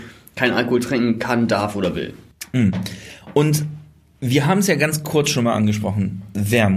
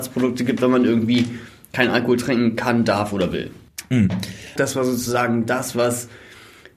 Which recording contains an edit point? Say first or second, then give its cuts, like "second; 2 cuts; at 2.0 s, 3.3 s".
second; 1 cut; at 4.6 s